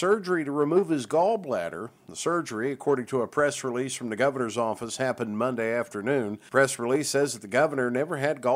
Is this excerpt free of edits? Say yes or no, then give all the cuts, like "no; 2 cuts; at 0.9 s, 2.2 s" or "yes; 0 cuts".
yes; 0 cuts